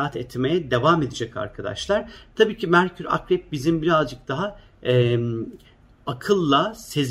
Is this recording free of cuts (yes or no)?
yes